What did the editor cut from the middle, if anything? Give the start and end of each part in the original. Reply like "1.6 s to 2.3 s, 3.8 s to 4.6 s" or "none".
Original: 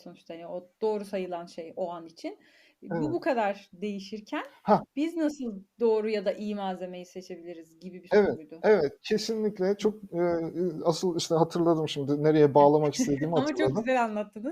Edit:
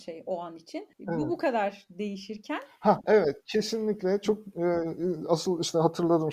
2.4 s to 2.8 s, 4.9 s to 8.6 s